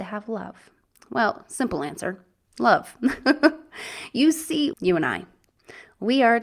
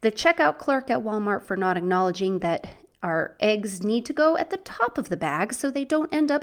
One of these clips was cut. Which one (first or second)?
first